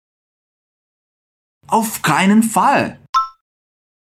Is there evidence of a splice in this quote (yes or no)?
no